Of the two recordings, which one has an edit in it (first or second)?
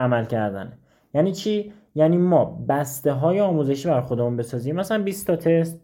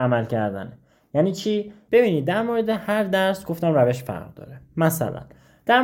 second